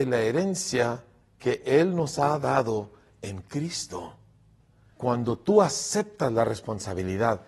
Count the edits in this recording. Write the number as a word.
one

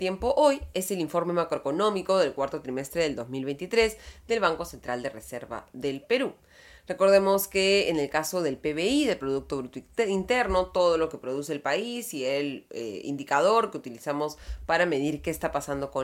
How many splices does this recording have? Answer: zero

